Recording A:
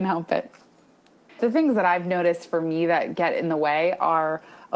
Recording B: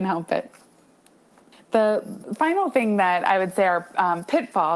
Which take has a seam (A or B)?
A